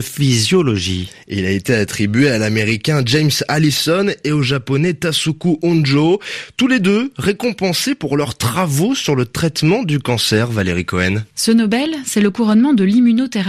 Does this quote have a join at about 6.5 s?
no; 1 cut; at 11.3 s

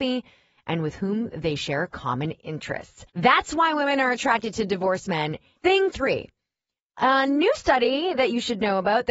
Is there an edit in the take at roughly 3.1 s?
yes; 2 cuts; at 3.1 s, 5.6 s

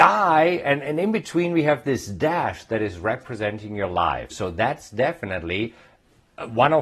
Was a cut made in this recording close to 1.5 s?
no; 1 cut; at 4.3 s

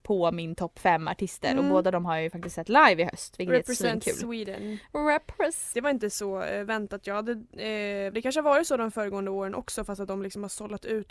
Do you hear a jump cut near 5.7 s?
yes; 2 cuts; at 5.7 s, 8.1 s

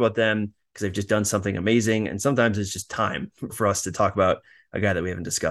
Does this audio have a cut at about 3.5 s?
yes; 1 cut; at 3.5 s

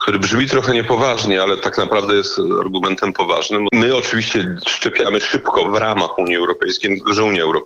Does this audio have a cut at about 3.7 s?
yes; 1 cut; at 3.7 s

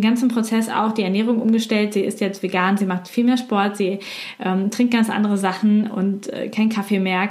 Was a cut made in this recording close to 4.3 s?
no; 0 cuts

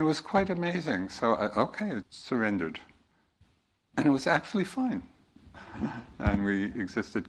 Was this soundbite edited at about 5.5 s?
yes; 2 cuts; at 2.0 s, 5.5 s

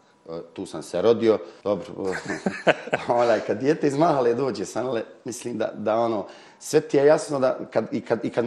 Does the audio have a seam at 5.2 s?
no; 1 cut; at 1.6 s

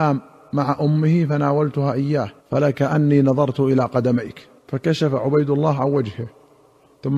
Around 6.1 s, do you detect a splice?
no; 2 cuts; at 2.4 s, 4.6 s

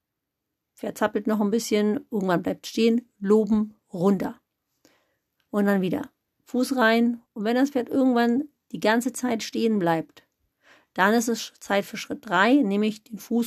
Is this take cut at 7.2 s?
yes; 1 cut; at 7.2 s

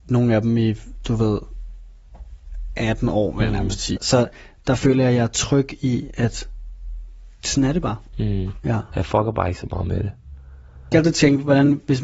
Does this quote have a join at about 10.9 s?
yes; 3 cuts; at 4.0 s, 8.6 s, 10.9 s

